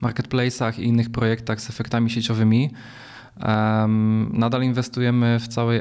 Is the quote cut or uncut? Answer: uncut